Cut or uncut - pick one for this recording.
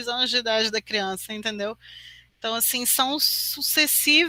uncut